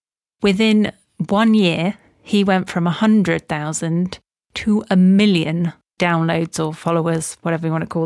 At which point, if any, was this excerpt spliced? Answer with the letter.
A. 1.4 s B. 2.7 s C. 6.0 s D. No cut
C